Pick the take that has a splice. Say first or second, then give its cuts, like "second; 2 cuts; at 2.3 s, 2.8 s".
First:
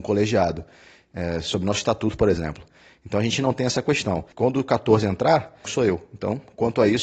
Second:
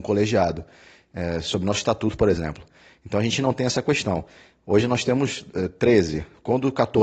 first; 2 cuts; at 4.3 s, 5.6 s